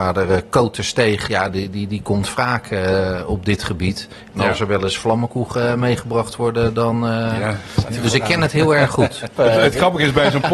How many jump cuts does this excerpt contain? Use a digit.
1